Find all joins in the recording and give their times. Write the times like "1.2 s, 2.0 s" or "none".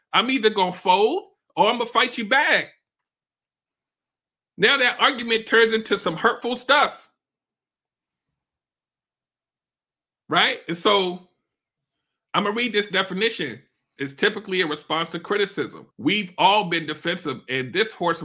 14.0 s, 15.9 s